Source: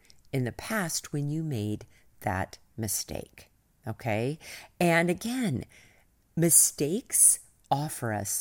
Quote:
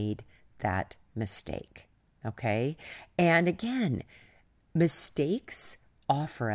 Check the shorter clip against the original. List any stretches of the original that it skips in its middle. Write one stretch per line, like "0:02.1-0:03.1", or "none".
none